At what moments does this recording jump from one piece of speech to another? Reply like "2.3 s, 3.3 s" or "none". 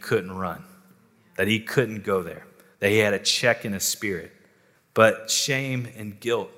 4.8 s